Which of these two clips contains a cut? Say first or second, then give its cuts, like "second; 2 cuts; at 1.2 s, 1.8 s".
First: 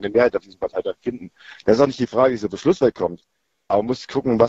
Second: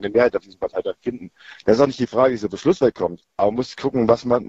second; 1 cut; at 3.3 s